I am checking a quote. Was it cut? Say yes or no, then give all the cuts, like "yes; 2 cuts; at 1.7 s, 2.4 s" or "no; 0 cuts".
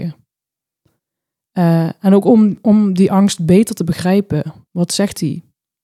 yes; 1 cut; at 4.7 s